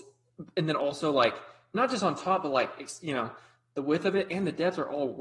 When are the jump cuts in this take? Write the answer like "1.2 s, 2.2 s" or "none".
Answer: none